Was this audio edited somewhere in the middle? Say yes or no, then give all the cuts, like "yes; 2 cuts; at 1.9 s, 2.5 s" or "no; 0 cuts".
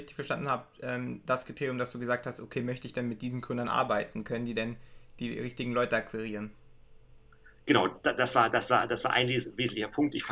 no; 0 cuts